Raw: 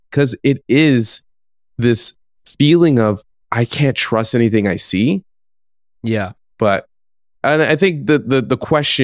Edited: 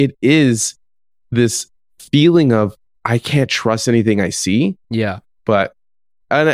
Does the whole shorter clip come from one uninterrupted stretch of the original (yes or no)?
no